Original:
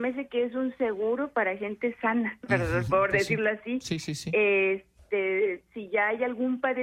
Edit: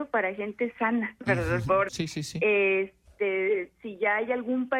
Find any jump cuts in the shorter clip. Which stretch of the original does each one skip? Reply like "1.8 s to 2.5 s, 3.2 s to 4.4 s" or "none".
3.1 s to 3.8 s